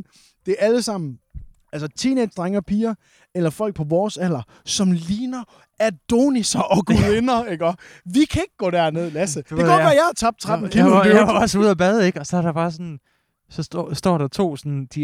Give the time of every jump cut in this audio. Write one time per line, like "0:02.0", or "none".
none

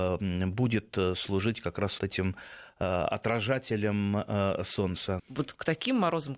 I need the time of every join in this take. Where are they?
0:02.0
0:05.2

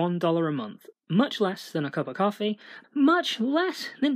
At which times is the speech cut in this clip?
0:00.9
0:02.8

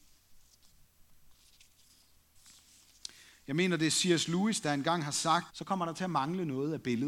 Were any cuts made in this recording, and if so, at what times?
0:05.5

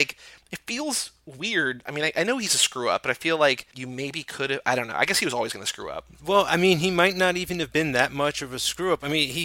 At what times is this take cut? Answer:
none

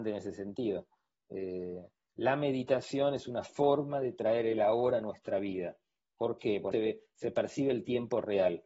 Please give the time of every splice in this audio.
0:06.7

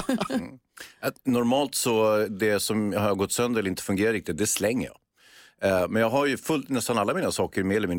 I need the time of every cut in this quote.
none

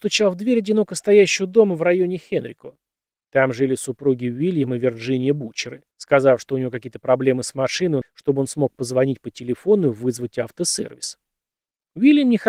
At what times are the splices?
0:05.9
0:08.0

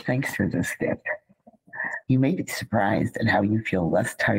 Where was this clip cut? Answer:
0:02.0

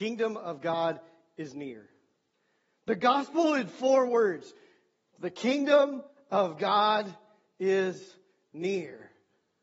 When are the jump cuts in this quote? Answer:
none

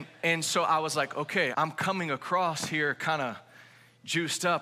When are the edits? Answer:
0:01.5

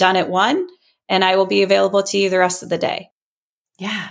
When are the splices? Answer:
none

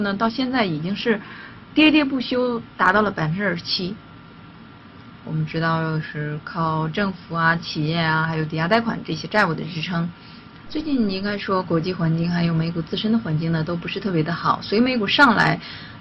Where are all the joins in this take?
0:05.2
0:10.7

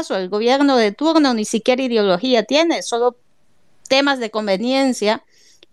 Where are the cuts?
none

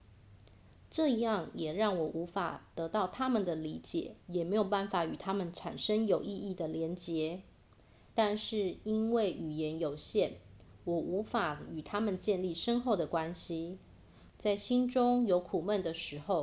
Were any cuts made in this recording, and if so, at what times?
0:04.2
0:08.1
0:14.3

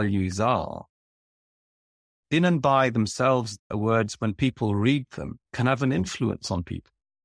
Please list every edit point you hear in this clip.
0:03.6
0:05.4

